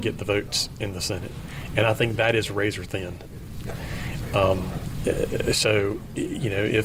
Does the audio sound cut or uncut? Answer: uncut